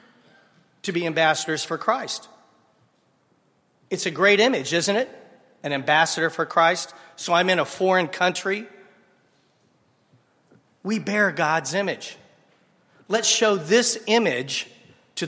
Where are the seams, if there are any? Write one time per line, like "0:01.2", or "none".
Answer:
none